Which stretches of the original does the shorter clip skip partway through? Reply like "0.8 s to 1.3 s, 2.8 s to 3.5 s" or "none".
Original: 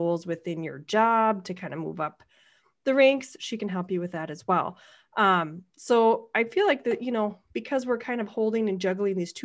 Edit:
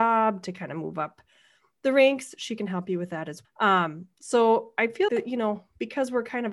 4.5 s to 5.0 s, 6.6 s to 6.8 s